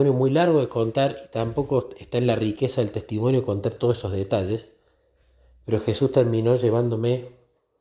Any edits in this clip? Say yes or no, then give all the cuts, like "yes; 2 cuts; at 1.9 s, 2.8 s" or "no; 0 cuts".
no; 0 cuts